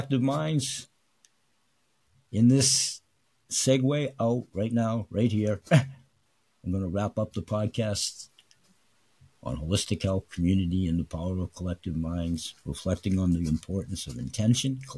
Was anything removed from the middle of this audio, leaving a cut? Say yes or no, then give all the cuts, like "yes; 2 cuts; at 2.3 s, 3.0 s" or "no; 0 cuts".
no; 0 cuts